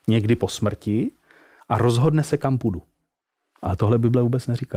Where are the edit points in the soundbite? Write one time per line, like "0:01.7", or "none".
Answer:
none